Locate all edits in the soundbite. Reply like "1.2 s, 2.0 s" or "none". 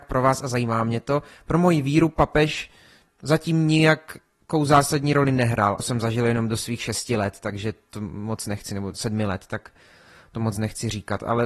5.8 s